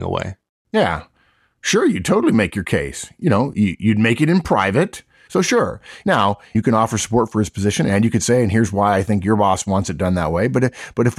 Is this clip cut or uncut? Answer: cut